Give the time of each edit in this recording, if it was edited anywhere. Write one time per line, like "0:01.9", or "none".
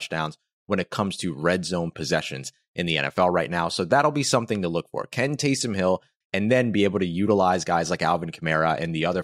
0:06.2